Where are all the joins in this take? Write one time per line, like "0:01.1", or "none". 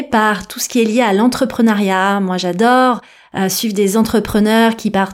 none